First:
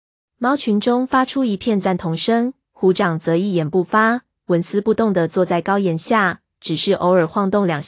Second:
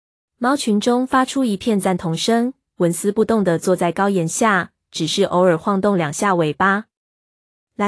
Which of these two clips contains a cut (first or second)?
second